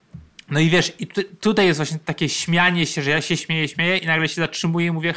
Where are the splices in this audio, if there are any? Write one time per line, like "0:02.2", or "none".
0:03.4